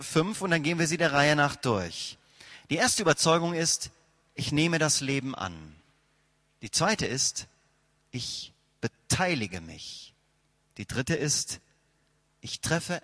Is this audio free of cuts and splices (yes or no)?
yes